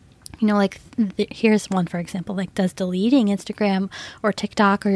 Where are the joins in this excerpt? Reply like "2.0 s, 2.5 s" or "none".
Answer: none